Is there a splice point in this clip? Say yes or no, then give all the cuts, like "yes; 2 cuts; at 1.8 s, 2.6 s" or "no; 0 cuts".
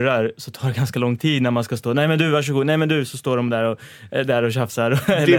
no; 0 cuts